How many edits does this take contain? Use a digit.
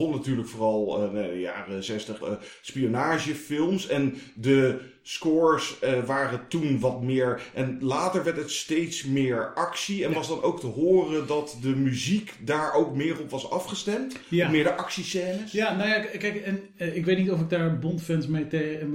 1